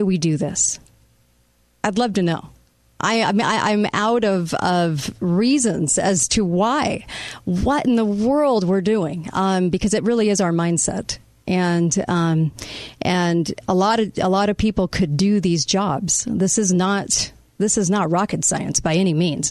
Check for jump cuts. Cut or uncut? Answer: uncut